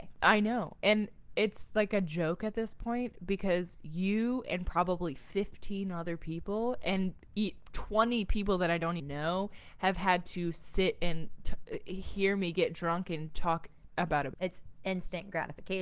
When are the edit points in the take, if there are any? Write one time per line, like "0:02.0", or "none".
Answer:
0:09.0
0:14.3

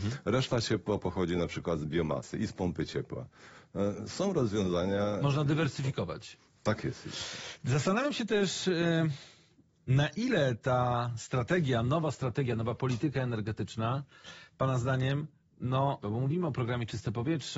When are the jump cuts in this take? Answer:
0:16.0

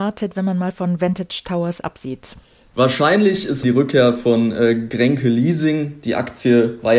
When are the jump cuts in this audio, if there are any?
none

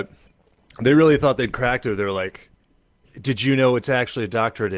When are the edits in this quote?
none

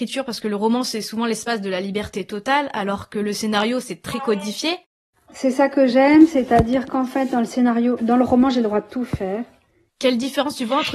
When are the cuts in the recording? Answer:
0:08.0
0:09.9

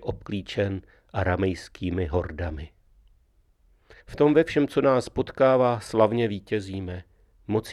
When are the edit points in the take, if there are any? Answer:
0:04.0

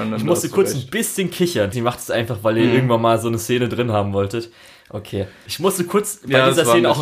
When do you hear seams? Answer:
0:01.7
0:05.5

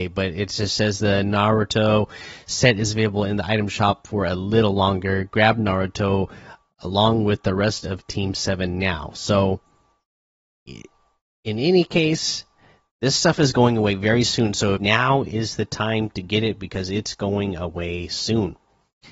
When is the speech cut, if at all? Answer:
0:14.8

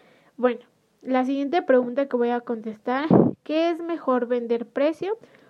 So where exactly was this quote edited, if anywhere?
none

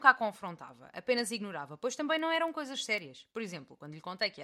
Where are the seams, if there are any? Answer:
none

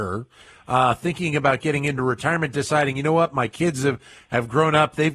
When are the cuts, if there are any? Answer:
none

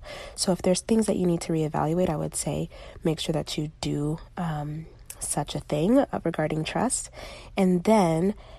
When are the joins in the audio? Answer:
none

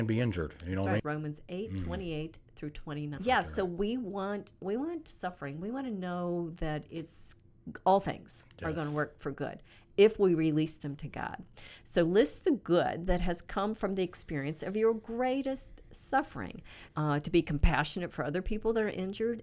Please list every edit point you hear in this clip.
0:01.0
0:03.2
0:16.9

